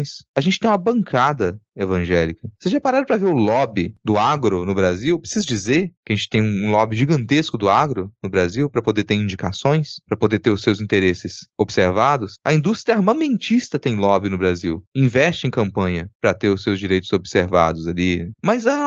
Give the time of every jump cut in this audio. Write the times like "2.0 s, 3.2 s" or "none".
none